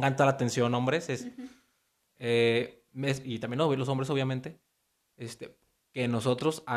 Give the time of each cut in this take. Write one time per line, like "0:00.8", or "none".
0:03.2